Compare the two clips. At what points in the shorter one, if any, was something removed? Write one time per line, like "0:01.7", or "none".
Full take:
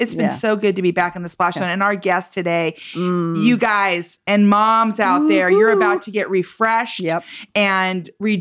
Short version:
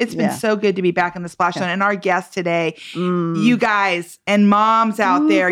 none